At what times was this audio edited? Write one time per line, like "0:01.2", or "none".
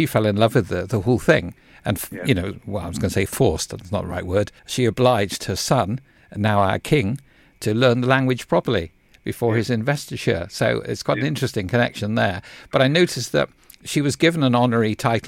0:04.6